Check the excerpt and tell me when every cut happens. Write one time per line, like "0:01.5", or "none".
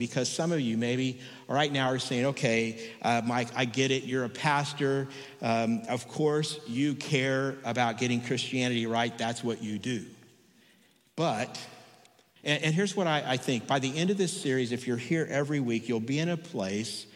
0:12.4